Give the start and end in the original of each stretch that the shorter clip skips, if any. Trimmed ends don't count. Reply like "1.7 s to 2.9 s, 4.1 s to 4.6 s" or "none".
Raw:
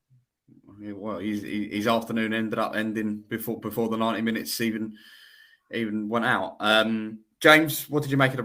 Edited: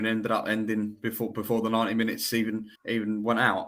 5.0 s to 5.6 s